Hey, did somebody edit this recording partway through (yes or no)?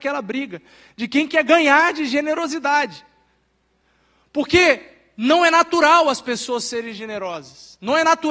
no